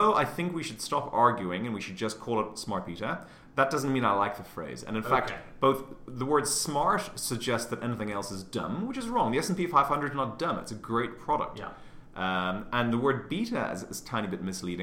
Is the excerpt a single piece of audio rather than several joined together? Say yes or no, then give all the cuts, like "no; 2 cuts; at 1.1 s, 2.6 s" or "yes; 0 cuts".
yes; 0 cuts